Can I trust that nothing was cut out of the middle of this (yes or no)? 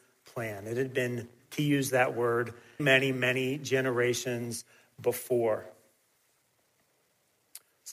no